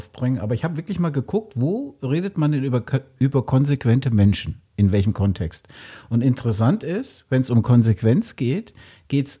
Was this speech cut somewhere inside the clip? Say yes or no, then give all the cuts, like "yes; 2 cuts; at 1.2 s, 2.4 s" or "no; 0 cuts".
no; 0 cuts